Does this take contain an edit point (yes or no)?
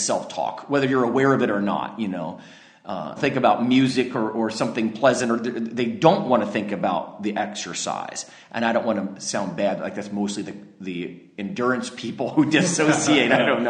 yes